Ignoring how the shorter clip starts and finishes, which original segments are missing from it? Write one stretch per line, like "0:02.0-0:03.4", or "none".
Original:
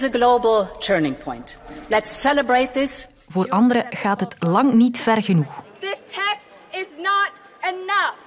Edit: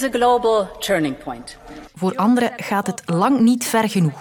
0:01.9-0:03.2